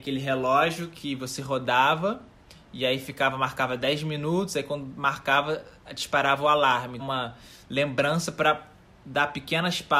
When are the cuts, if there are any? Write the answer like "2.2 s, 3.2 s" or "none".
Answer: 7.0 s

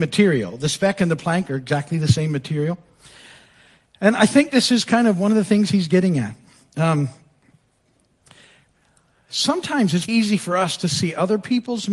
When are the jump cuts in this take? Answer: 10.1 s

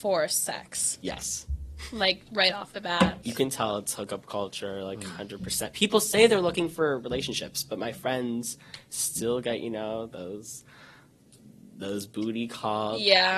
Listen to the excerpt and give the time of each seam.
3.2 s

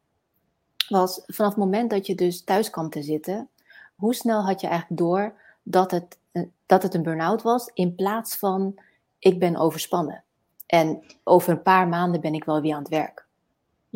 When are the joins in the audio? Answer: 4.0 s

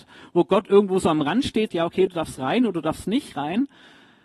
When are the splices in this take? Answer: 1.7 s

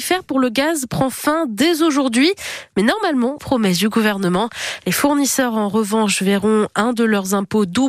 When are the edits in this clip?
3.4 s

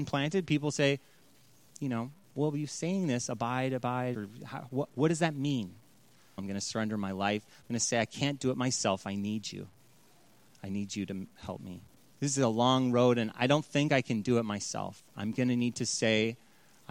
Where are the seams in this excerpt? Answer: 4.1 s, 6.4 s, 12.1 s

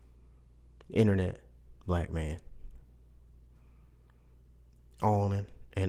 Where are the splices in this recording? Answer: none

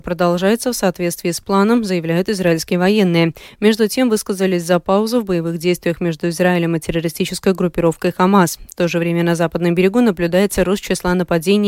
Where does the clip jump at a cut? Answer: none

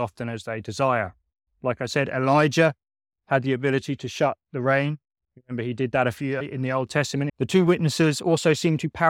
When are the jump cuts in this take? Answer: 1.5 s, 7.3 s

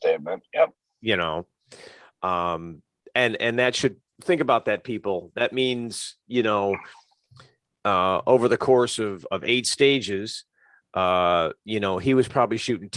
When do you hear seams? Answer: 4.1 s

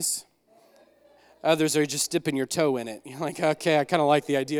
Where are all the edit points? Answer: none

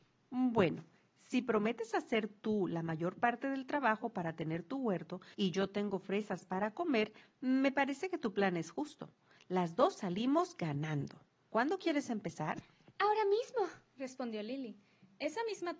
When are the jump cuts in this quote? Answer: none

